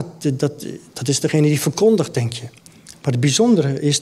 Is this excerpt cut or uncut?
uncut